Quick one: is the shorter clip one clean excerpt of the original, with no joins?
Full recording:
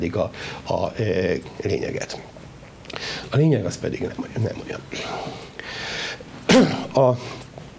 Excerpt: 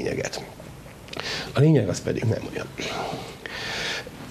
no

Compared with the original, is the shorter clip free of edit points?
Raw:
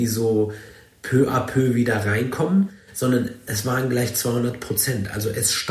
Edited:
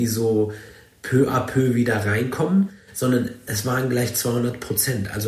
yes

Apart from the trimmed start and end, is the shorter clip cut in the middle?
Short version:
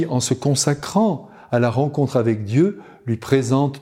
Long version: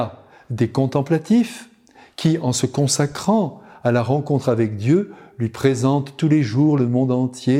no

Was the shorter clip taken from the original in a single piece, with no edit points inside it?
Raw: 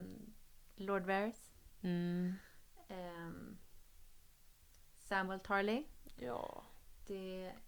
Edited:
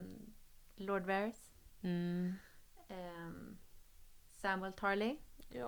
no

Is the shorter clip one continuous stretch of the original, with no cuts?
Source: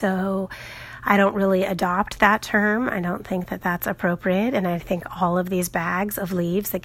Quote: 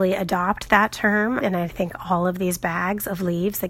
no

